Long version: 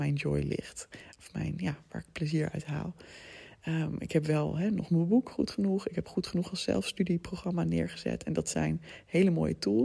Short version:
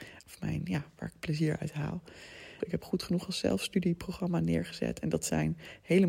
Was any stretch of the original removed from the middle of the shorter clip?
yes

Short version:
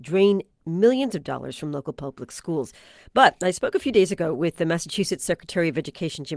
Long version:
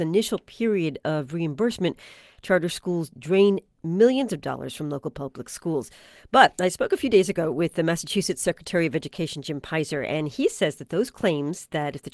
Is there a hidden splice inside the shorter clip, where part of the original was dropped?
no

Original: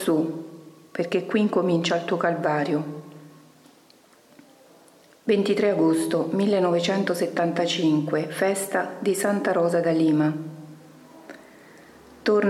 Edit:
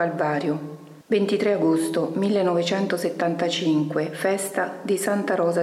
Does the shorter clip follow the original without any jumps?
no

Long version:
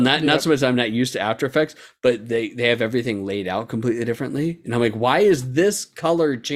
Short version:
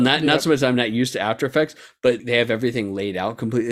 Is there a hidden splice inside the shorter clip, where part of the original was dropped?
yes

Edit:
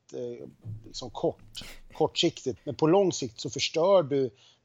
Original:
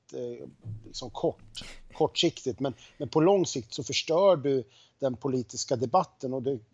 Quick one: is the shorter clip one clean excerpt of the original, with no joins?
no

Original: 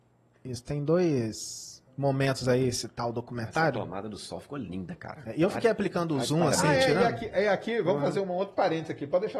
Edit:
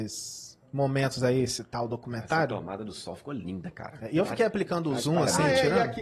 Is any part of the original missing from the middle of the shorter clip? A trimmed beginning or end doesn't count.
no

